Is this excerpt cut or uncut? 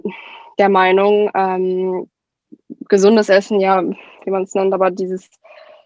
uncut